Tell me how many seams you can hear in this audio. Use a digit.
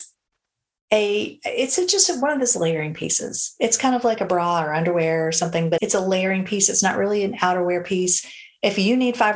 1